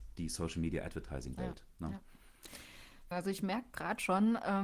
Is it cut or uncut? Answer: cut